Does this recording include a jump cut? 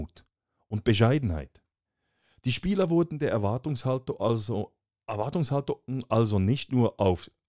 no; 0 cuts

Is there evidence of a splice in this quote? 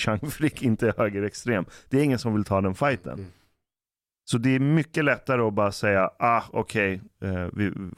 no; 0 cuts

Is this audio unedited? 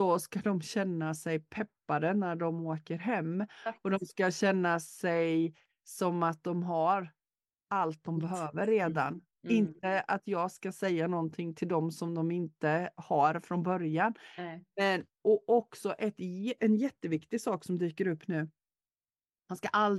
yes; 0 cuts

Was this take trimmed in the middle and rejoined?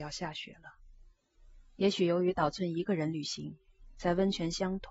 yes; 1 cut; at 1.7 s

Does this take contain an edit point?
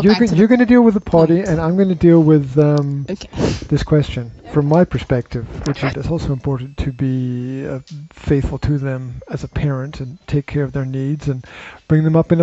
yes; 1 cut; at 5.9 s

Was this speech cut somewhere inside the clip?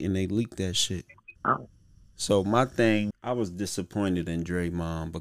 yes; 2 cuts; at 1.4 s, 3.1 s

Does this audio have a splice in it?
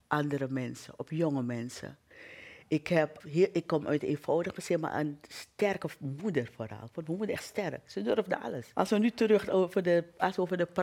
yes; 2 cuts; at 3.2 s, 8.7 s

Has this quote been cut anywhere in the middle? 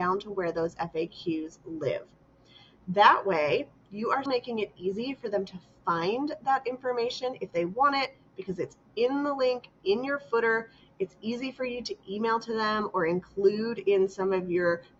yes; 1 cut; at 4.3 s

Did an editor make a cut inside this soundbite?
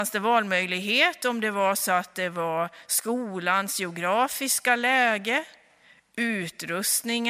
no; 0 cuts

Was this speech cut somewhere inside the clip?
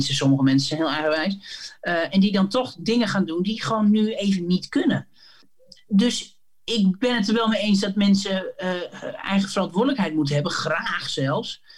no; 0 cuts

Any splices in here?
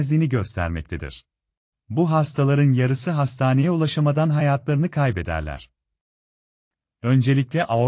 yes; 1 cut; at 1.7 s

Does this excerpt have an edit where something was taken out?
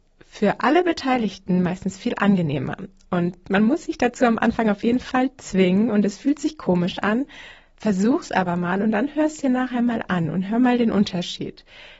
no; 0 cuts

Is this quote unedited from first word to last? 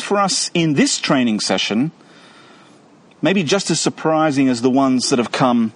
yes; 0 cuts

